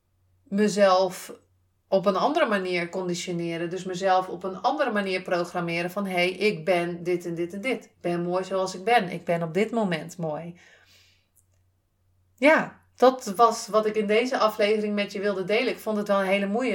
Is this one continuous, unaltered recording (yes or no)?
no